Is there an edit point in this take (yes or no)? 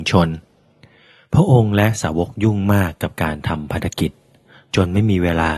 no